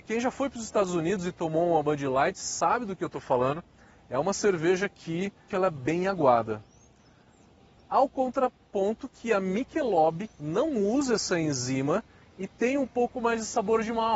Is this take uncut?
no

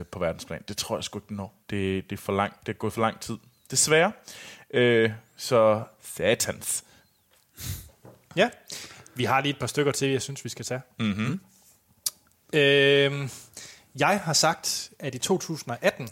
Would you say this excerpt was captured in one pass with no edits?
no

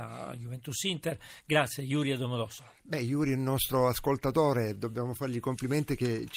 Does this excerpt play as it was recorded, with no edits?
yes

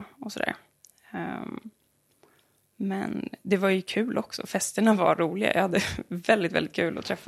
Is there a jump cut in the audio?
no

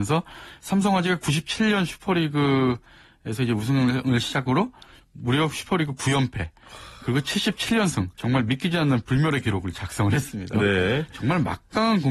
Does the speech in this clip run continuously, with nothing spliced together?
no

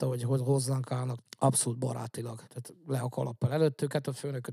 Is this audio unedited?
no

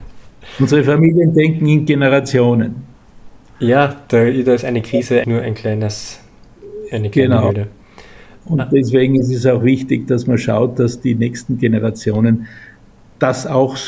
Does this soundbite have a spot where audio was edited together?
yes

